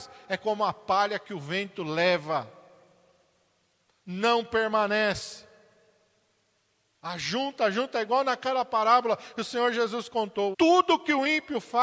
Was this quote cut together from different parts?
yes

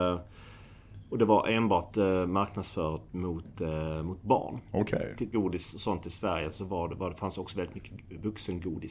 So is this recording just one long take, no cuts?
no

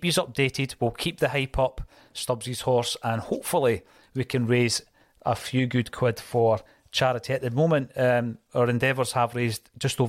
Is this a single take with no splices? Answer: yes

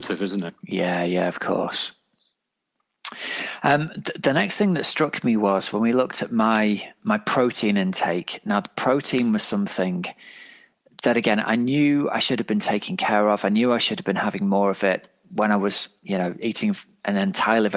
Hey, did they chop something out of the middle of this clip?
no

